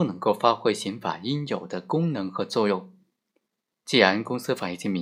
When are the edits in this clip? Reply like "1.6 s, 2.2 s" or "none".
none